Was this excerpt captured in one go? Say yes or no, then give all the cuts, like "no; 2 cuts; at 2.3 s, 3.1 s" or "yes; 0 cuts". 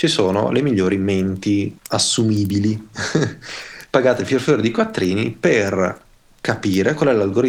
no; 1 cut; at 1.8 s